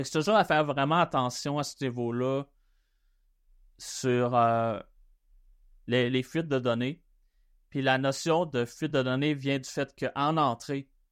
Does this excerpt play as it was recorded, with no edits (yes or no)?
yes